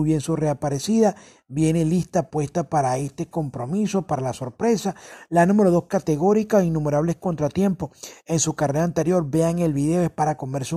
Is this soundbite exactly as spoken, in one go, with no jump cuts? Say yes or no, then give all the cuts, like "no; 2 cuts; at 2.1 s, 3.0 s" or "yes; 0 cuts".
yes; 0 cuts